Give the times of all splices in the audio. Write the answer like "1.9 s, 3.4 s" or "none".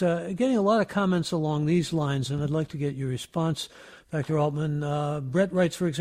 none

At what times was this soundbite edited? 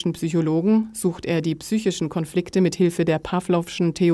none

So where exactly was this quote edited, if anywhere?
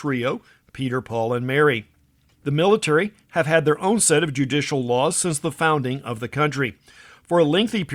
2.3 s

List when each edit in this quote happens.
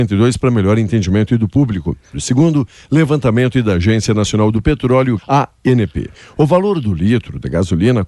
2.1 s, 5.2 s

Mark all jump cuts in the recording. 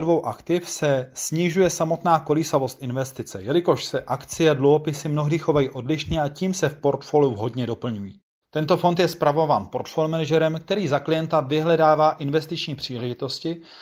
8.4 s

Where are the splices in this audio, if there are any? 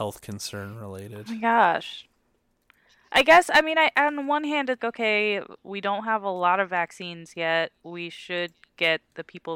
4.8 s

